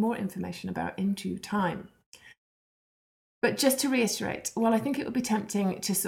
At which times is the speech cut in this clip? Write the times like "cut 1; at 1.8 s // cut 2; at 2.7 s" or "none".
none